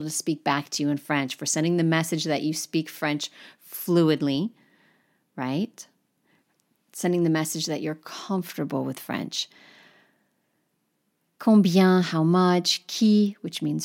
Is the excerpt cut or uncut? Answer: uncut